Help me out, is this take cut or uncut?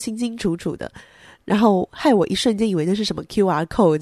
uncut